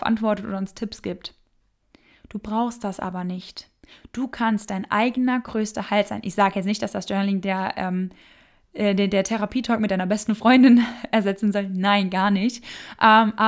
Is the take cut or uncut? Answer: uncut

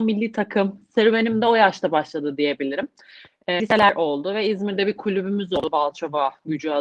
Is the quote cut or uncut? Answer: cut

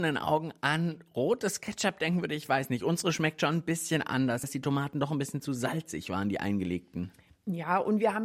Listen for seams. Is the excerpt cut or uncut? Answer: cut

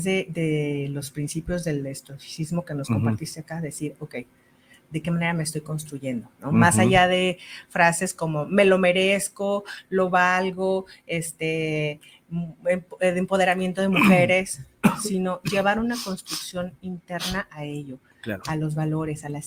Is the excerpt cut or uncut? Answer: uncut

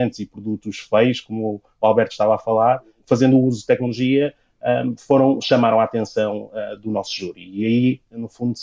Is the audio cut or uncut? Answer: uncut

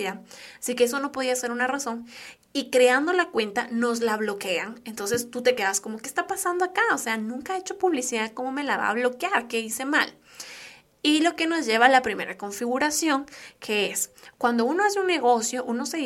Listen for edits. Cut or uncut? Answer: uncut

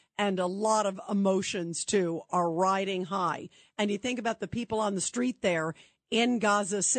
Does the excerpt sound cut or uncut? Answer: uncut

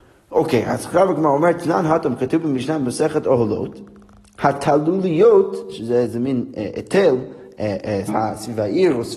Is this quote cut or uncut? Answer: cut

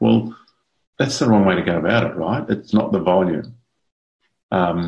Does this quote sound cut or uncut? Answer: cut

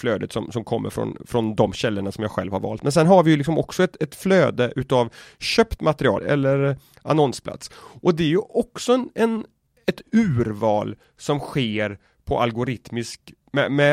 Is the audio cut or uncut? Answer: cut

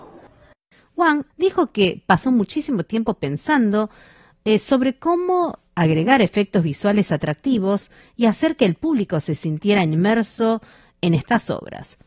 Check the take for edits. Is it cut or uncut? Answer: cut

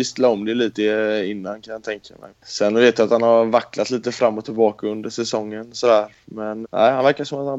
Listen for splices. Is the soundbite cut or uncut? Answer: cut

